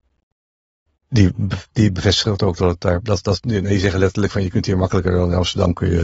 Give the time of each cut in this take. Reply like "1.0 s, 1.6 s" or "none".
none